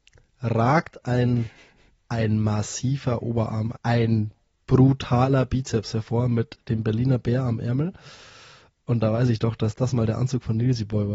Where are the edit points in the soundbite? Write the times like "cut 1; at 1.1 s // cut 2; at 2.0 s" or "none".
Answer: cut 1; at 3.7 s